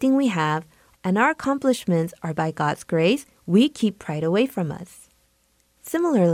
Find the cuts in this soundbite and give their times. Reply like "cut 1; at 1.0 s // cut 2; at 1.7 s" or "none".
cut 1; at 0.9 s // cut 2; at 3.4 s